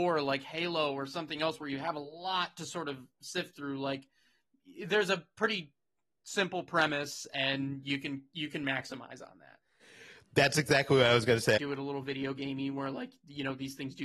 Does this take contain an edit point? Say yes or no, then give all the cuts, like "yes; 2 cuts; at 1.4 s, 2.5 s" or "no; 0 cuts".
yes; 1 cut; at 11.6 s